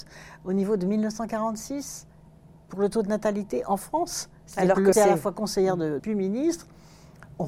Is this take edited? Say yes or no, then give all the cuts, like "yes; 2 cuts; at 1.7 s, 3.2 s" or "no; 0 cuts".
yes; 2 cuts; at 4.9 s, 6.0 s